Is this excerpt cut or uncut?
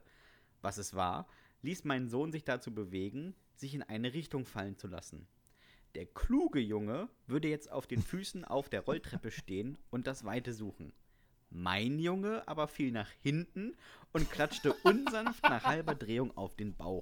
uncut